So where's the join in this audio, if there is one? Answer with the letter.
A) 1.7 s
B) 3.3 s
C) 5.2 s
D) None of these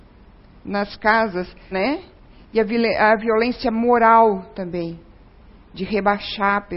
A